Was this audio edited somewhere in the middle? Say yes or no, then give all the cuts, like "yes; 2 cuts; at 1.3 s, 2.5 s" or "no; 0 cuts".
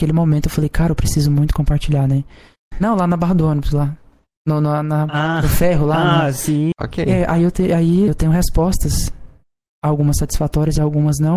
yes; 3 cuts; at 2.7 s, 6.7 s, 8.1 s